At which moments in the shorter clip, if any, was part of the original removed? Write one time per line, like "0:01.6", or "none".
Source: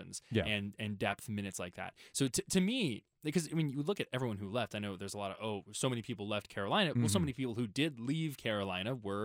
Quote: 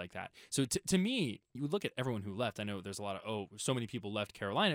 0:01.5